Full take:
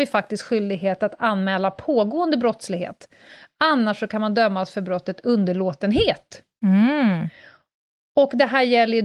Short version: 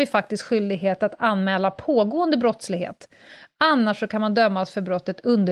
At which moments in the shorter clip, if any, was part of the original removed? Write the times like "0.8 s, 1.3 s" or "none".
none